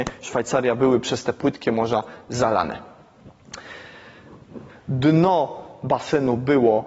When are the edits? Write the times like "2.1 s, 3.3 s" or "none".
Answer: 4.7 s